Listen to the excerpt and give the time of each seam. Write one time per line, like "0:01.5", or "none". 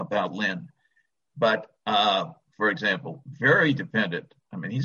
0:02.5